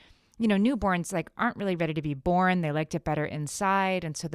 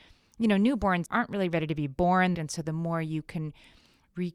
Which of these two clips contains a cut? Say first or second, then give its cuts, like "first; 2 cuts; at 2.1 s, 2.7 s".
second; 2 cuts; at 1.1 s, 2.3 s